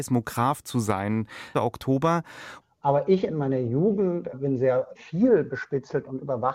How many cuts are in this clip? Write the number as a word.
two